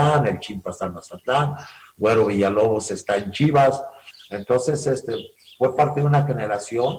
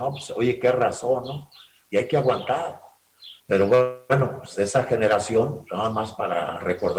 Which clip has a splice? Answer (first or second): second